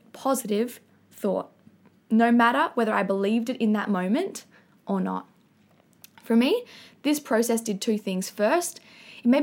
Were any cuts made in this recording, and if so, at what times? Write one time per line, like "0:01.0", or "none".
none